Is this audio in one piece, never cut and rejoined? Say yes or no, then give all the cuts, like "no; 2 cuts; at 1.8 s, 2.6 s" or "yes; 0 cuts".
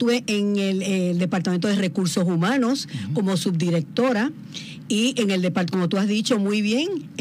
yes; 0 cuts